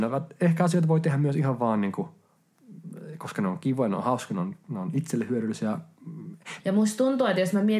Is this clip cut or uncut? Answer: cut